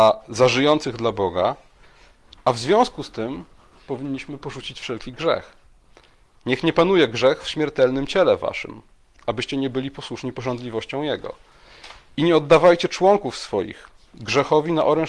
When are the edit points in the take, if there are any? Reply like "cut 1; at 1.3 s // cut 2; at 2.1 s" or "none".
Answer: none